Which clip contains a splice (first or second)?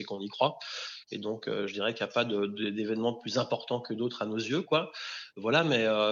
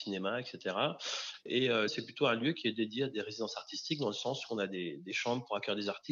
second